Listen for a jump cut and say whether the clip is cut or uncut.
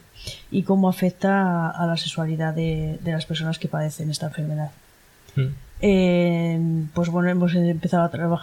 uncut